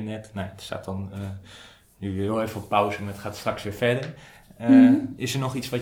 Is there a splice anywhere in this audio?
no; 0 cuts

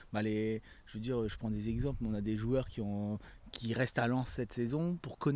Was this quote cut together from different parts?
no; 0 cuts

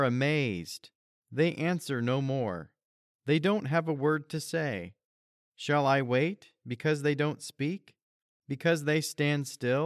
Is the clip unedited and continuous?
yes; 0 cuts

